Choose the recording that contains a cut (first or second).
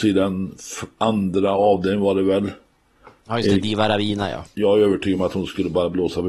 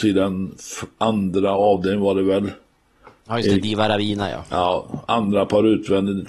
first